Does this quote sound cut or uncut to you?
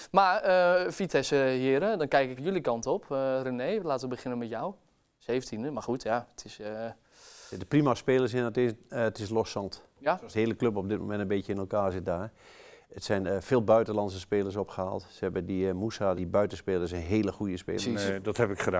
cut